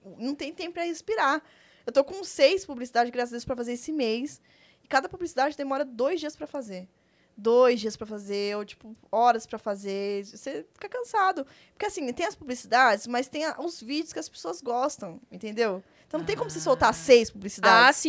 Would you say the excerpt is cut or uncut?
uncut